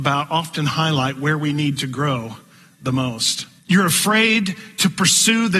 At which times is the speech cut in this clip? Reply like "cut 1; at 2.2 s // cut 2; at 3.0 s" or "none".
cut 1; at 3.6 s